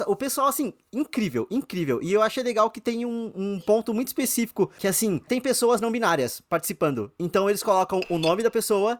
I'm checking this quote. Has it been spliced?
no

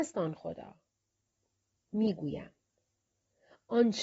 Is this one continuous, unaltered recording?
yes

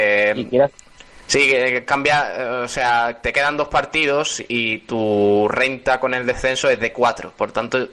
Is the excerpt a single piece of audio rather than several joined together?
yes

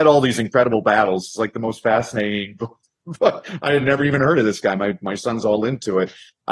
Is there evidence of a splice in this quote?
no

